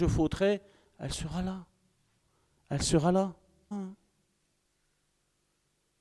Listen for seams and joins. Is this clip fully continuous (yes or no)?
no